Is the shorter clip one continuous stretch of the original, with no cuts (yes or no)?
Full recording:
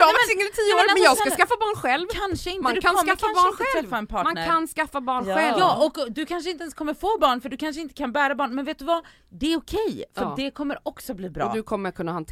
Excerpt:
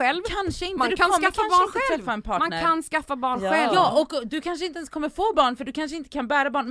yes